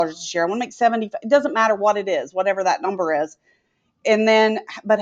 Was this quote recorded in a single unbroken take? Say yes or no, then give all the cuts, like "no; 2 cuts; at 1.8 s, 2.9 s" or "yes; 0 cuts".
yes; 0 cuts